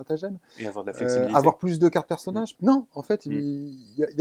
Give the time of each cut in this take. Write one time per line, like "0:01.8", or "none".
0:02.5